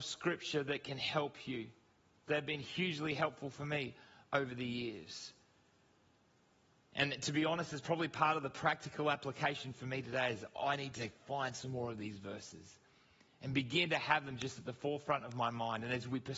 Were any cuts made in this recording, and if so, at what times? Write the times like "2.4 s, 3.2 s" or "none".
none